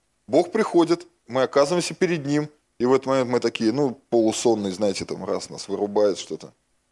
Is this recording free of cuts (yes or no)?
no